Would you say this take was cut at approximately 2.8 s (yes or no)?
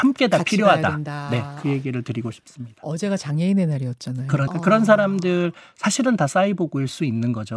no